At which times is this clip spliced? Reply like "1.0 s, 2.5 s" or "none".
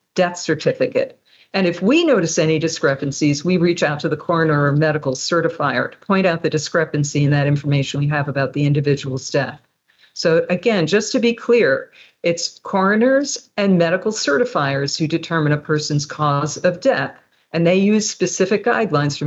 none

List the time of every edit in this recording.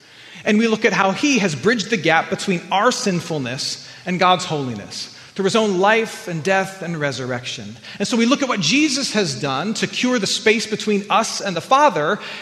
none

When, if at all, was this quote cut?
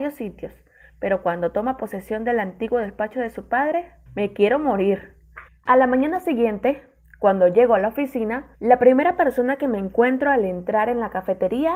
4.1 s, 5.5 s, 8.5 s

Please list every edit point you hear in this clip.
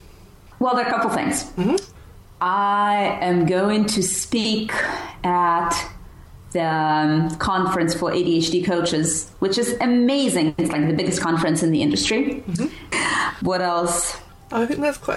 12.9 s

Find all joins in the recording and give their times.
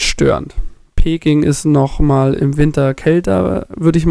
0.9 s

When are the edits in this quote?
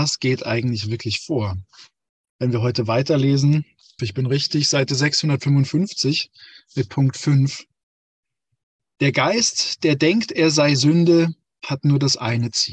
4.0 s

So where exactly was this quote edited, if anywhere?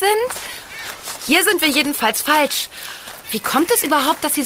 1.2 s, 3.2 s

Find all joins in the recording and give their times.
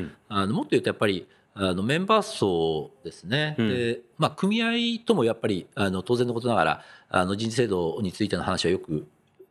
none

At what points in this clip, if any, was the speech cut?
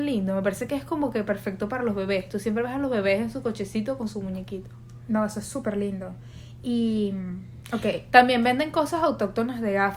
none

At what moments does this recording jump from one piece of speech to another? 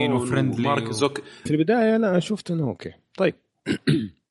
1.5 s

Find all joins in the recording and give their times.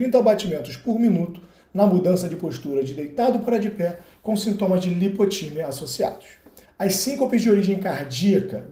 6.6 s

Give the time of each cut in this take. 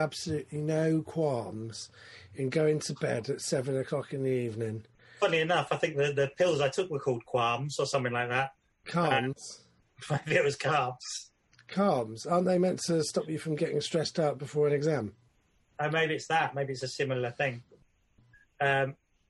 none

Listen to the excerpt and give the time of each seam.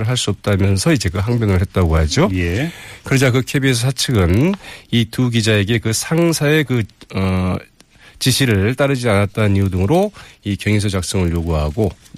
none

